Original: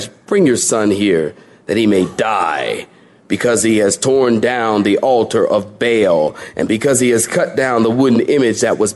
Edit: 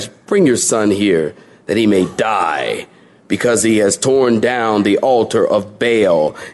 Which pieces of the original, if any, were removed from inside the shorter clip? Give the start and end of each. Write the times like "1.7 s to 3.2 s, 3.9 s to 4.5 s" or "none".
none